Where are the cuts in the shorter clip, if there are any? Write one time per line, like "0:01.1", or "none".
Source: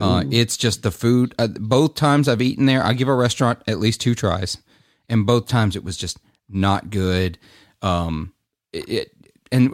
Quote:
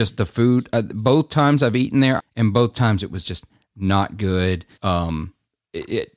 0:02.2
0:04.7